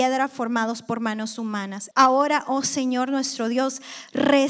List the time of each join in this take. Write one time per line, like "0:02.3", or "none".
0:01.9